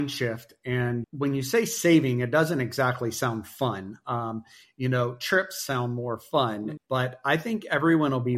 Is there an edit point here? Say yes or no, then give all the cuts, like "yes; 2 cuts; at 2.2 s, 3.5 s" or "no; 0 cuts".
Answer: yes; 2 cuts; at 1.0 s, 6.8 s